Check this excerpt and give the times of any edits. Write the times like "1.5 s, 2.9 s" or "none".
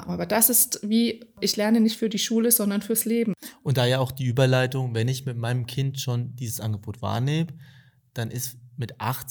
none